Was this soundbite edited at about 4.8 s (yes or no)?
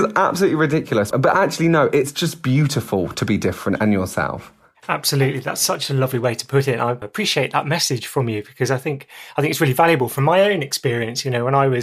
no